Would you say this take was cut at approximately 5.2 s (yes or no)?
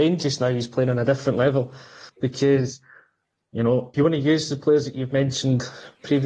no